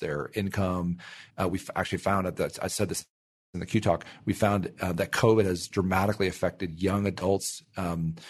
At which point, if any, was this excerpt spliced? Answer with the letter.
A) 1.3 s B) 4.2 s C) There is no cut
C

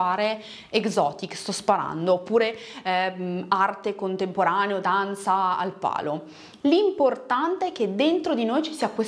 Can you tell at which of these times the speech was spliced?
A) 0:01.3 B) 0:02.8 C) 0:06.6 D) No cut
C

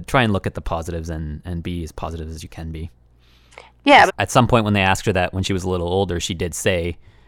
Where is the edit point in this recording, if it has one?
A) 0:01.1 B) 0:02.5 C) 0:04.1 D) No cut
C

